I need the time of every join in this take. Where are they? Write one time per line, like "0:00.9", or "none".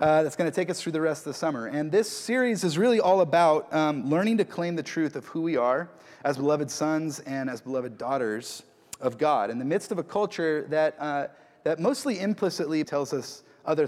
0:12.8

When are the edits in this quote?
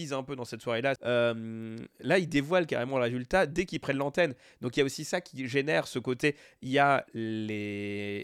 0:01.0

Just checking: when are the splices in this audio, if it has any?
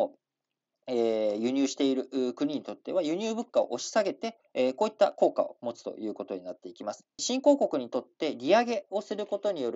0:04.4
0:07.2

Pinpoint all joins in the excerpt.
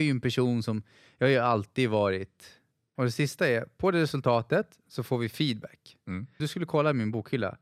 0:03.0
0:06.4

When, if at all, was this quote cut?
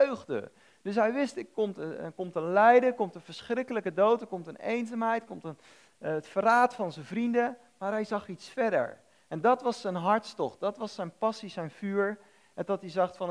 none

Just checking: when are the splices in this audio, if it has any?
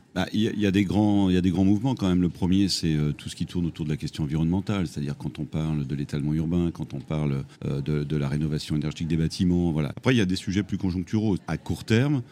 0:07.5
0:09.9
0:11.4

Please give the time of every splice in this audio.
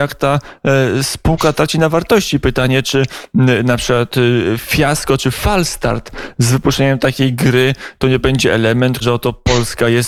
0:09.0

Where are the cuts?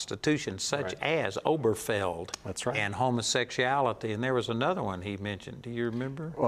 none

